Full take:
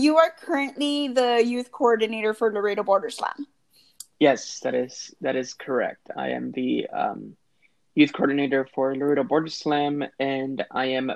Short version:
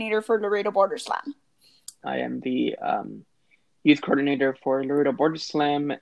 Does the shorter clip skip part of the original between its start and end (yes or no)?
yes